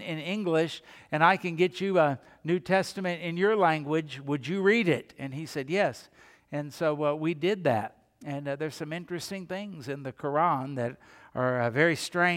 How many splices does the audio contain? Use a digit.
0